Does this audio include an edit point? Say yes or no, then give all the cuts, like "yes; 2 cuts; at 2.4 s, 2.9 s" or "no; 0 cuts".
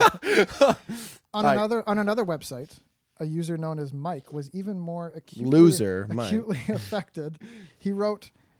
no; 0 cuts